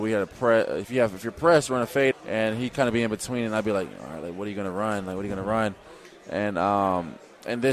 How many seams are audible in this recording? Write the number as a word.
one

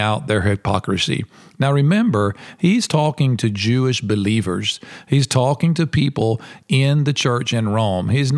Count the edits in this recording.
zero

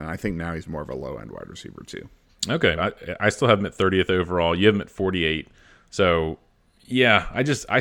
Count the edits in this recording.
one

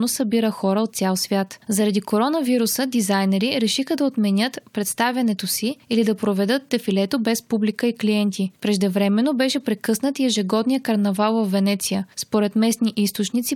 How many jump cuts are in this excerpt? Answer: zero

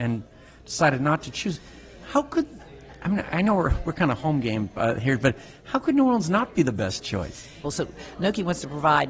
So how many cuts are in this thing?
one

